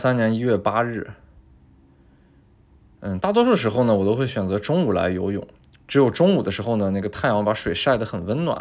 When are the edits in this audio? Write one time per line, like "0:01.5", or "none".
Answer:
none